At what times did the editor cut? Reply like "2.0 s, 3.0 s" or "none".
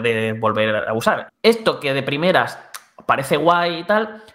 1.3 s